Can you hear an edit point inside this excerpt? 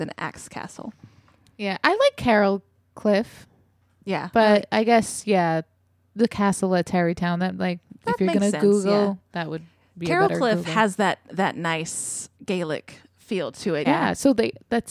yes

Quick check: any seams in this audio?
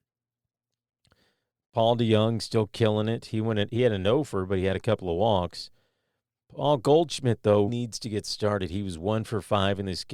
yes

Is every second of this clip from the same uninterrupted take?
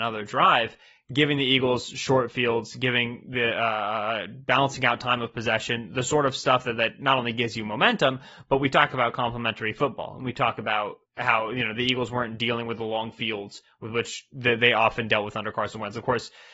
no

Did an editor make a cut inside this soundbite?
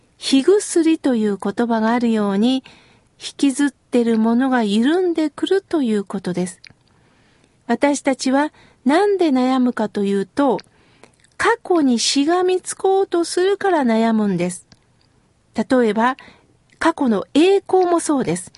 yes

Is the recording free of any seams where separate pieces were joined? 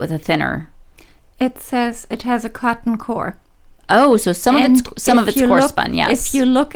yes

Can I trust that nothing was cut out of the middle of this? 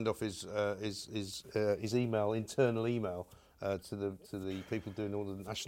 yes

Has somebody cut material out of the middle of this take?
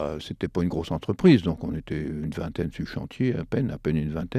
no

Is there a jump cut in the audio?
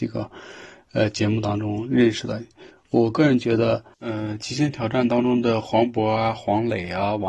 yes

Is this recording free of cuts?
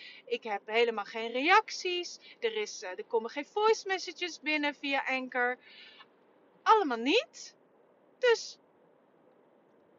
yes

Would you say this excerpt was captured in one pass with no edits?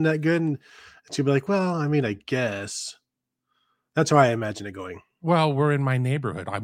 yes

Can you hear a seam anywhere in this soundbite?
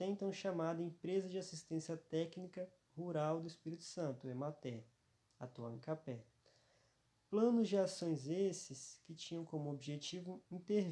no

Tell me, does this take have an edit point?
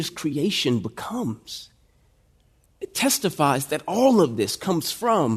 yes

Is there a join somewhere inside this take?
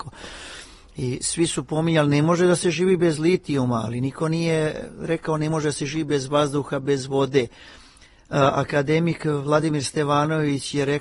no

